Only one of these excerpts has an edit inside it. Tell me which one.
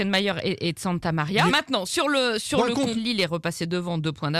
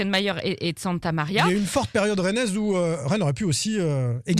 first; 2 cuts; at 1.5 s, 3.0 s

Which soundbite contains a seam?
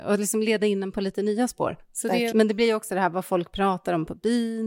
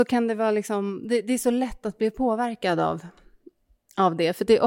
first; 1 cut; at 2.3 s

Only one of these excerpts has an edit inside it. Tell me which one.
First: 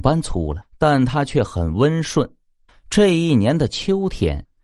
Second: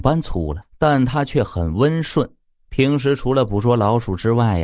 first; 1 cut; at 2.7 s

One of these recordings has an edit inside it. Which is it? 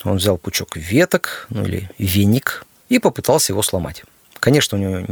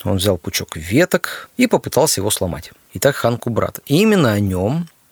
second; 2 cuts; at 1.5 s, 2.9 s

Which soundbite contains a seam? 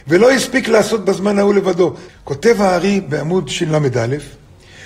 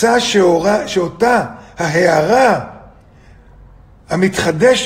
first; 1 cut; at 2.1 s

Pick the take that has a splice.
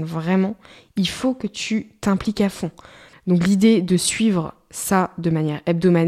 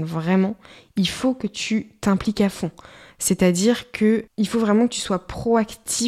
first; 1 cut; at 3.1 s

